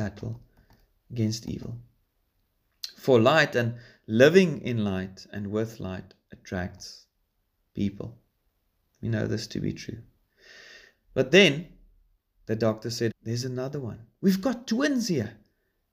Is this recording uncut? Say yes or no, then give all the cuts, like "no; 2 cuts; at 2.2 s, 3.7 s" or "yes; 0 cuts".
no; 2 cuts; at 10.9 s, 13.1 s